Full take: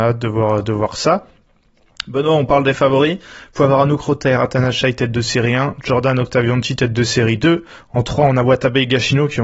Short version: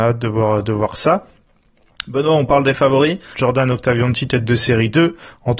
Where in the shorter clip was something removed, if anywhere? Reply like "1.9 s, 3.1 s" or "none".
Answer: 3.3 s